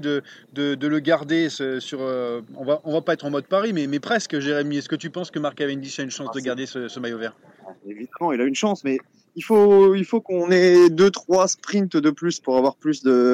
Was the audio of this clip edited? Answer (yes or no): no